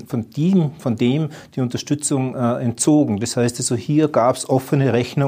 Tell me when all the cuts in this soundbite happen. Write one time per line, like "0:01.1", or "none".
none